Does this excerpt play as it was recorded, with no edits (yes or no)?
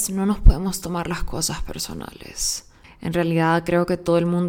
no